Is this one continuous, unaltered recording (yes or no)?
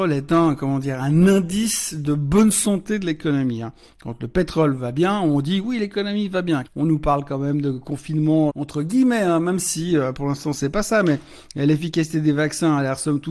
no